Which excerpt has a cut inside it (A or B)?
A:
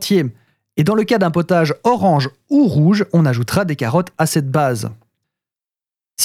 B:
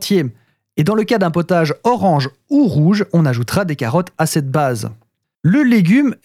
B